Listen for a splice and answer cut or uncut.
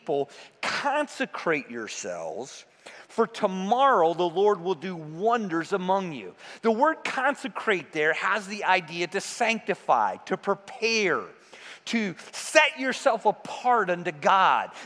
uncut